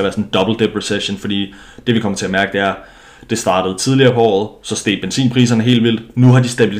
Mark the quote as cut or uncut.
uncut